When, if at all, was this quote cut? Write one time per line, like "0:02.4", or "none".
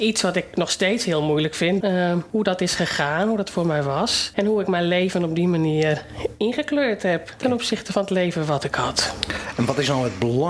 0:01.8